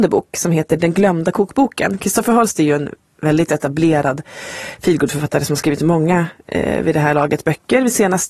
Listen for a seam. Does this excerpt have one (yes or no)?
no